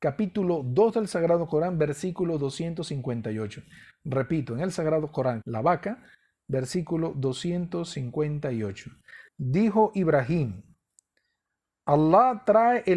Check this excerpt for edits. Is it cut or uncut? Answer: cut